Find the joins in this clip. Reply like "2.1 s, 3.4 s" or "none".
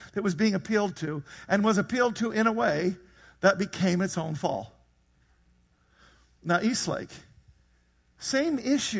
none